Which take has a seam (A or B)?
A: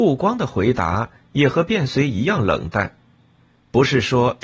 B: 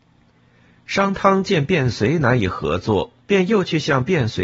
B